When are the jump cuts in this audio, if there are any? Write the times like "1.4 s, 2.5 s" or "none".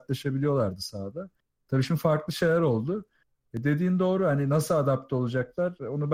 none